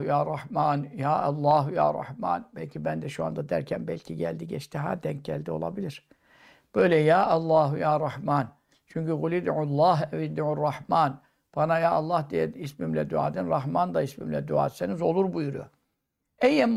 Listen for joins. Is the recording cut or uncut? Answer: uncut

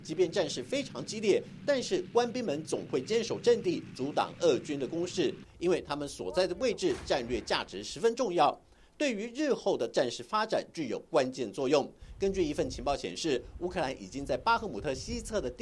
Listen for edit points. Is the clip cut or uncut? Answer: uncut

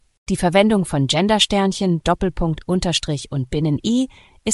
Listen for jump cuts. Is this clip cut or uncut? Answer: uncut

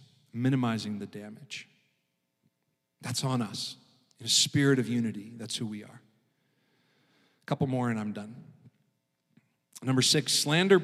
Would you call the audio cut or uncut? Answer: uncut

